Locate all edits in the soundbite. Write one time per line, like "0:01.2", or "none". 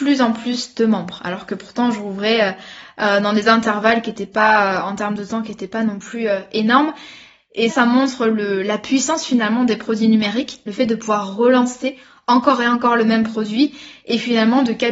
0:07.7